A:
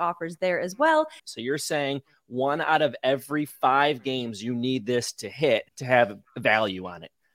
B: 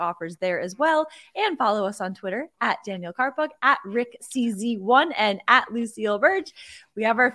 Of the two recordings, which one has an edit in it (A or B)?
A